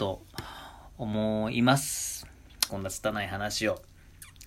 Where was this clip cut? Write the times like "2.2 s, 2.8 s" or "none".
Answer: 2.7 s